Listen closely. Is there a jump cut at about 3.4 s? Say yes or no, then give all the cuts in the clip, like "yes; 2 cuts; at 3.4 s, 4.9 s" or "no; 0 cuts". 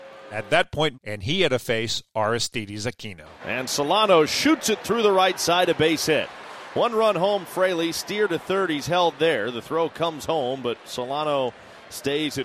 yes; 2 cuts; at 0.9 s, 3.4 s